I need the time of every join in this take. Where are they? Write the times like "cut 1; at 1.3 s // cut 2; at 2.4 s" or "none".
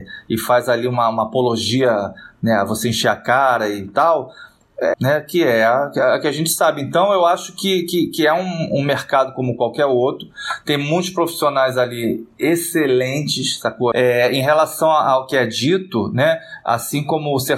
cut 1; at 4.9 s // cut 2; at 13.9 s